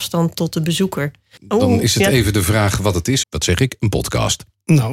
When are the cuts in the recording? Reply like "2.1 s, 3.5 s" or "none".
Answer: 1.4 s, 3.2 s